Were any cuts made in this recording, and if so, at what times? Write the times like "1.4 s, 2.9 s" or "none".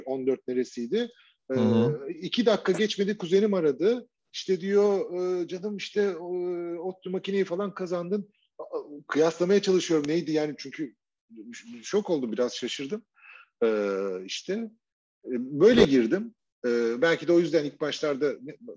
none